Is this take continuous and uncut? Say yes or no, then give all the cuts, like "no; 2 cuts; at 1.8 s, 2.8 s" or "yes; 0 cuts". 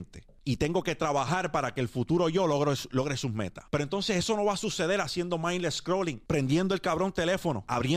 yes; 0 cuts